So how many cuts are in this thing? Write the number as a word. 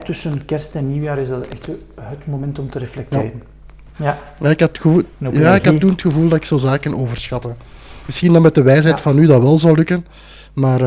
one